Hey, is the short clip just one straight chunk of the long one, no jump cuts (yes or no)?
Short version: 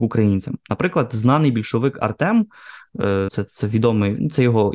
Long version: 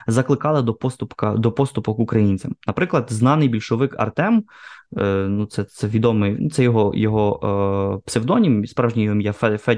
no